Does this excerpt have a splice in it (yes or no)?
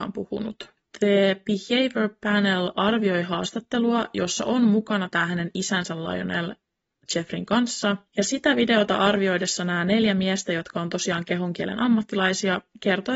no